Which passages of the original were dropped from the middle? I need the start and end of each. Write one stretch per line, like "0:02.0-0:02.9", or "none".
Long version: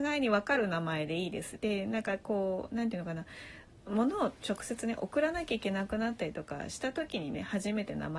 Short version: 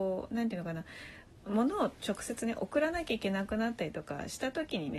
none